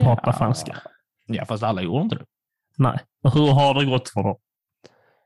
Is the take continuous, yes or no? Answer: yes